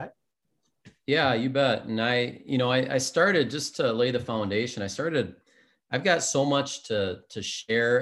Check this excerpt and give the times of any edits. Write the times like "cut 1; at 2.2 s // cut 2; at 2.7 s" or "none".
none